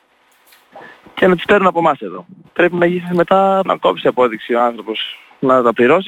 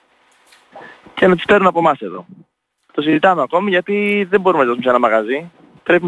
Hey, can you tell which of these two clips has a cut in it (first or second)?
first